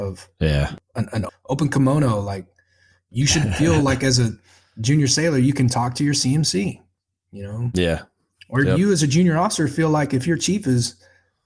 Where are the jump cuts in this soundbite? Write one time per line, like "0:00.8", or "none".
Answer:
0:01.3